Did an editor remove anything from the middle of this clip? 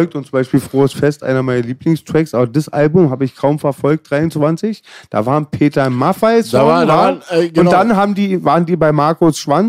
no; 0 cuts

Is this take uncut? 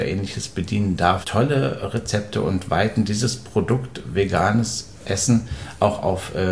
no; 1 cut; at 1.2 s

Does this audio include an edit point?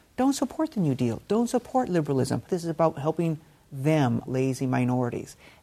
yes; 2 cuts; at 2.5 s, 4.3 s

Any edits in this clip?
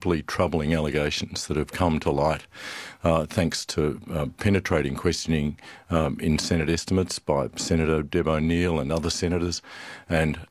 no; 0 cuts

